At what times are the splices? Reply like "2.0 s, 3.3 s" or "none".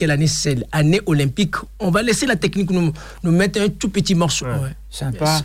4.4 s